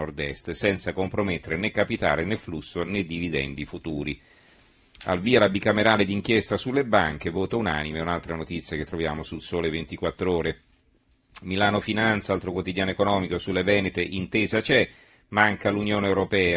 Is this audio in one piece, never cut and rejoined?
yes; 0 cuts

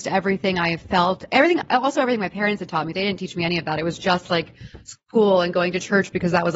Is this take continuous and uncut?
yes; 0 cuts

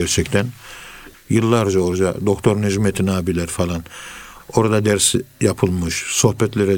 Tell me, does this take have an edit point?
yes; 2 cuts; at 1.1 s, 4.4 s

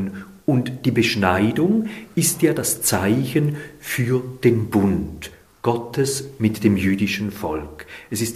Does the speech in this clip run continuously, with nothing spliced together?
yes; 0 cuts

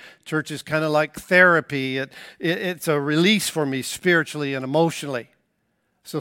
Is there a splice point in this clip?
no; 0 cuts

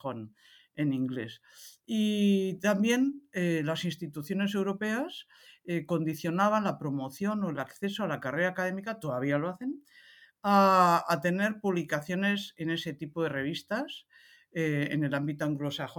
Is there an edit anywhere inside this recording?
no; 0 cuts

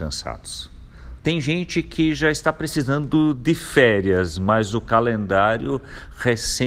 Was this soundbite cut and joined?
yes; 1 cut; at 1.2 s

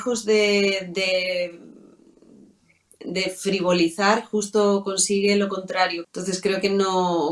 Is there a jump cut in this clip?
yes; 1 cut; at 6.0 s

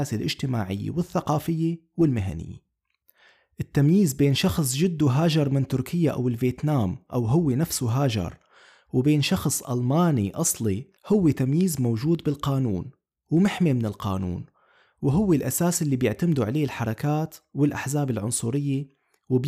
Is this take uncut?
no; 1 cut; at 11.0 s

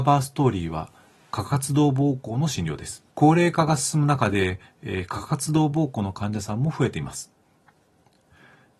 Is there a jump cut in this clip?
yes; 1 cut; at 3.1 s

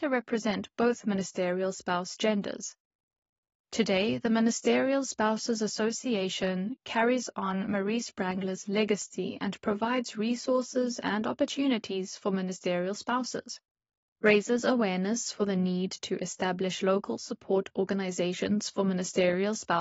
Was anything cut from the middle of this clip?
yes; 1 cut; at 14.1 s

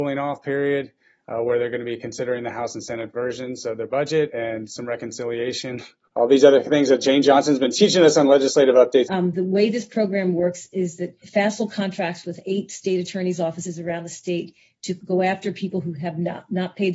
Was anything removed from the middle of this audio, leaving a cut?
yes; 2 cuts; at 9.0 s, 11.2 s

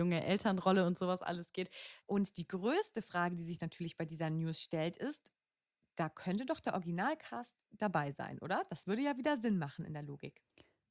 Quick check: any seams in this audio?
yes; 1 cut; at 2.0 s

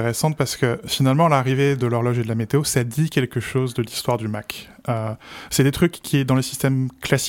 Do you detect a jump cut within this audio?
no; 0 cuts

